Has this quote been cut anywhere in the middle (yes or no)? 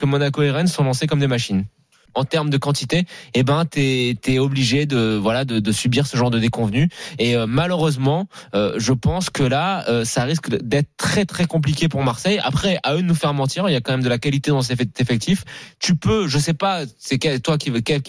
yes